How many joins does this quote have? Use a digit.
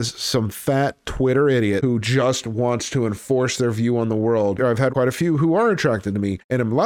1